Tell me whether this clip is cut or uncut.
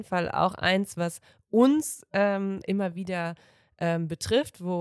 cut